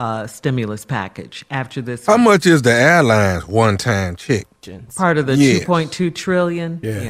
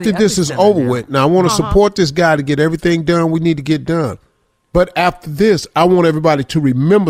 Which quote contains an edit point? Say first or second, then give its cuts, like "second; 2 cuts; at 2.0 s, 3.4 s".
first; 1 cut; at 4.6 s